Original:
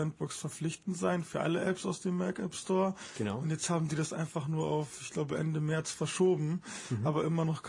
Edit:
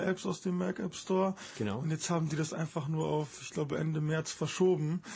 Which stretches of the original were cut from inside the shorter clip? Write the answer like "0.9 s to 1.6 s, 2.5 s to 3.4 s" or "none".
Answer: none